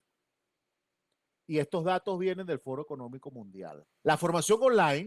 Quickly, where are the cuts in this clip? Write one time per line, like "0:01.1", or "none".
0:03.8